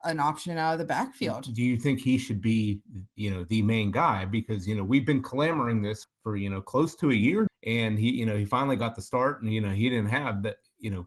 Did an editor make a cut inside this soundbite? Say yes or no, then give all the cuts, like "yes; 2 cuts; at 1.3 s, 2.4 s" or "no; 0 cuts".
yes; 2 cuts; at 6.0 s, 7.5 s